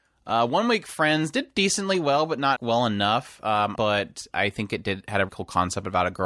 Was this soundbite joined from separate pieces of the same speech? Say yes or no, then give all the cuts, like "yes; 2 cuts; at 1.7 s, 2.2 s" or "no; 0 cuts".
yes; 3 cuts; at 2.6 s, 3.8 s, 5.3 s